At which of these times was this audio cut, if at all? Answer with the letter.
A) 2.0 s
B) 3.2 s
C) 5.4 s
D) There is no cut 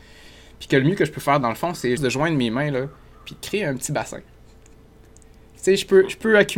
A